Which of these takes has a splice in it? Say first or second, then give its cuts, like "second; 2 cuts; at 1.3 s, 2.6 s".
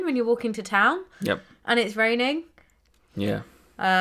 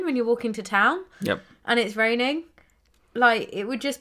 first; 1 cut; at 3.1 s